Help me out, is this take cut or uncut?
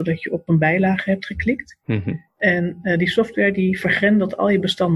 uncut